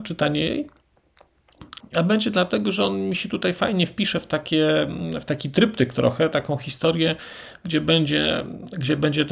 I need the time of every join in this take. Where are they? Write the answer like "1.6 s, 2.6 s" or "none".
1.8 s